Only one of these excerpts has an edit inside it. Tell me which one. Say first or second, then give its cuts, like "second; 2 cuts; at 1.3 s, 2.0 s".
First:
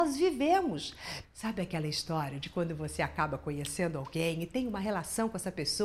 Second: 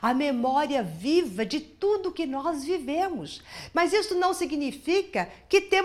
first; 1 cut; at 1.2 s